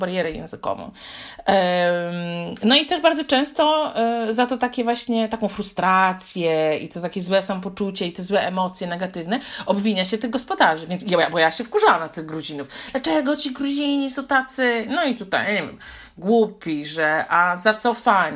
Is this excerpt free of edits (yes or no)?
yes